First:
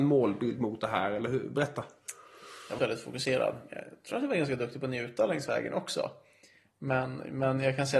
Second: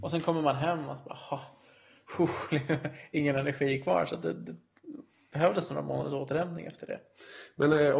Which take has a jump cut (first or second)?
first